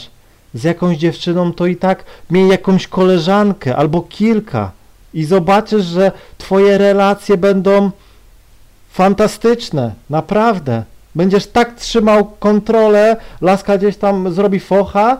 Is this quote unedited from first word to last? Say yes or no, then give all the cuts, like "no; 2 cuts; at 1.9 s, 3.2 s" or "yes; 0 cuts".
yes; 0 cuts